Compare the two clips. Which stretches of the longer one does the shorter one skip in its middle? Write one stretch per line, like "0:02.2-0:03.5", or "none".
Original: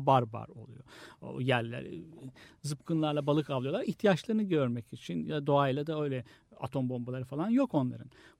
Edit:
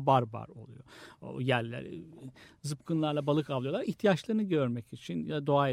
none

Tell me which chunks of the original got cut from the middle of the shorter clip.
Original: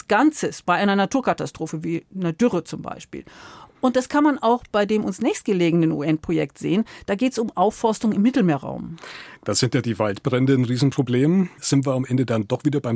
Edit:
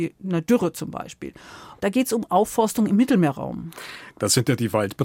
0:03.7-0:07.1

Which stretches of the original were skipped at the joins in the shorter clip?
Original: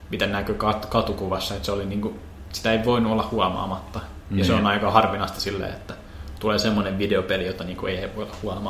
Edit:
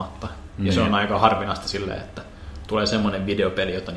none

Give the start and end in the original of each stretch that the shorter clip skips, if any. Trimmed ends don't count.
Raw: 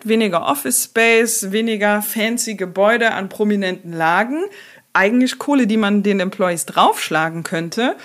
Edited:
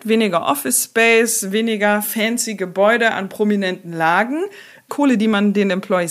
0:04.9-0:05.4

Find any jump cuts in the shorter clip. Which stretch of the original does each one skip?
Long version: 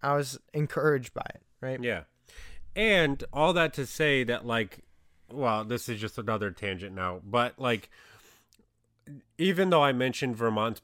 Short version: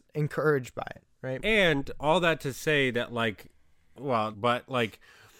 0:01.8-0:02.7
0:05.6-0:07.2

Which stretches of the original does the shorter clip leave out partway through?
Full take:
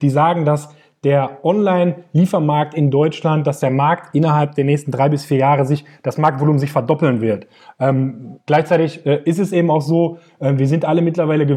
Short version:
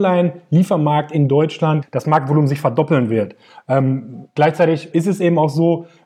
0:03.4-0:05.9
0:09.0-0:09.2

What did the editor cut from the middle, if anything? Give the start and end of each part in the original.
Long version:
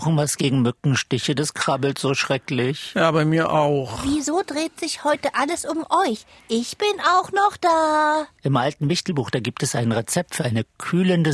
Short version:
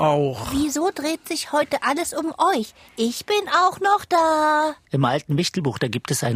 none

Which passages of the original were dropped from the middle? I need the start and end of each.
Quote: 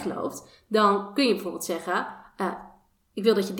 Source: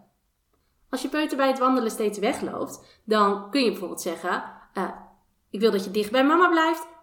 none

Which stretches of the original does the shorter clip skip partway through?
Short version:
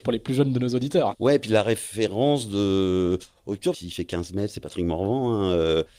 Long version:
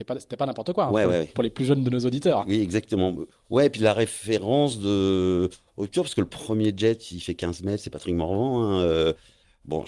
0:02.4-0:03.4
0:06.0-0:07.0

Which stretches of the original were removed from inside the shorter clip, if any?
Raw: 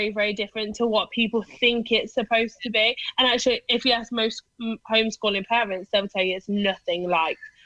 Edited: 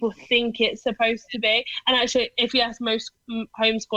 none

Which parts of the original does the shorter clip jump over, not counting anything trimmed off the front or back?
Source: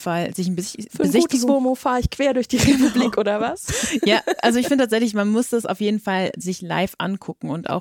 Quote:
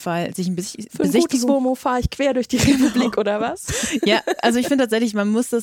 none

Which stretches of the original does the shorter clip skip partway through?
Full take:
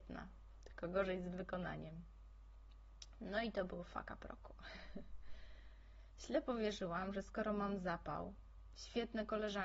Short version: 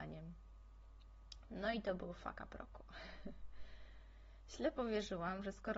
none

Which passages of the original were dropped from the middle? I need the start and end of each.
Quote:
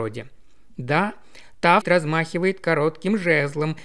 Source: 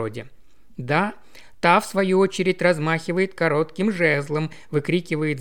0:01.8-0:02.5

